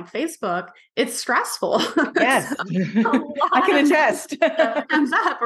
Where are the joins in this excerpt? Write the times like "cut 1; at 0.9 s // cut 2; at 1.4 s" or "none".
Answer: none